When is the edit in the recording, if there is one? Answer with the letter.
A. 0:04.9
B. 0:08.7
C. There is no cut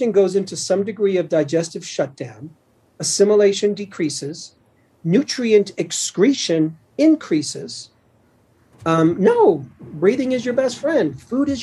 B